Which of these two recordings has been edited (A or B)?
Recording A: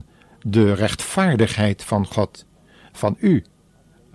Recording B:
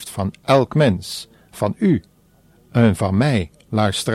A